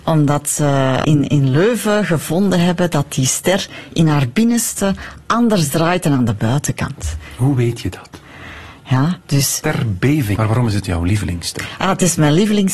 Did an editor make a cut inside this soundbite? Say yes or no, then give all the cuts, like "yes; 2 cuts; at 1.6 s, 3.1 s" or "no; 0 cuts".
yes; 3 cuts; at 1.0 s, 8.7 s, 10.4 s